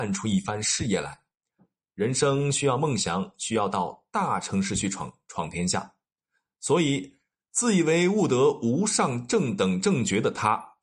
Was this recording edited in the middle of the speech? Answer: no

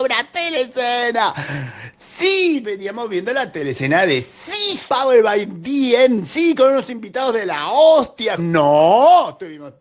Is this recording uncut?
no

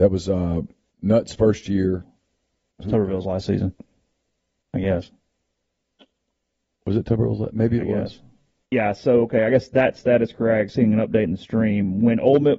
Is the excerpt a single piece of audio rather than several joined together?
no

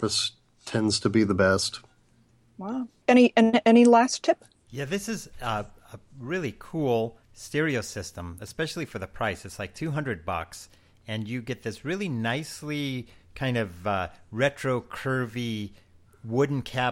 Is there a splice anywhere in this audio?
yes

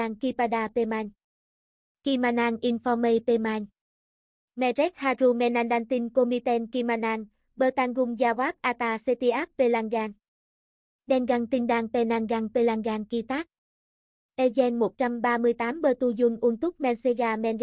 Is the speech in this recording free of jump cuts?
no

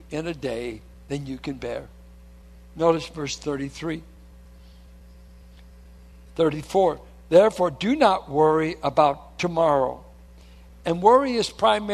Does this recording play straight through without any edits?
yes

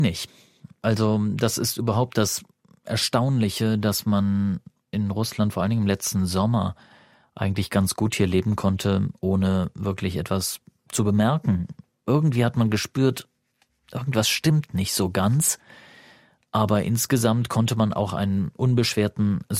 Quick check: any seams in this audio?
no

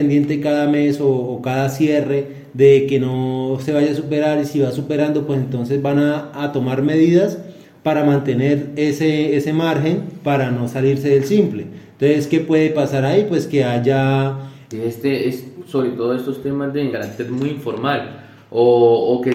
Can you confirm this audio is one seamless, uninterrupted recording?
no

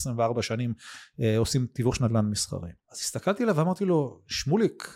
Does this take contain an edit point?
yes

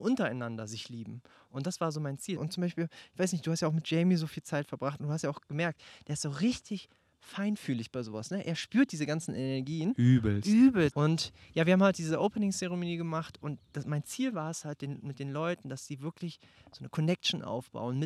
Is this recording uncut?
no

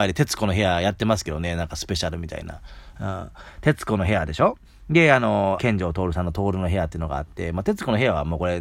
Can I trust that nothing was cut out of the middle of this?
no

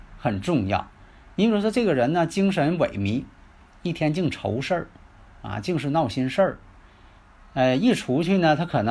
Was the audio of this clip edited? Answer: no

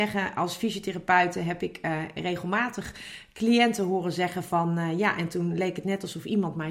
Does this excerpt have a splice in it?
no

